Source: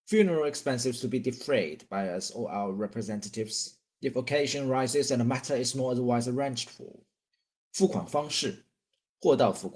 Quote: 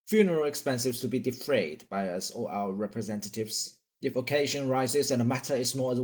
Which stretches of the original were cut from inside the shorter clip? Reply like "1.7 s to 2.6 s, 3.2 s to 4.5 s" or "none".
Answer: none